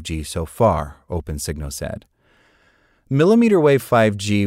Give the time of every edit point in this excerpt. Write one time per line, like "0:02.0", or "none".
none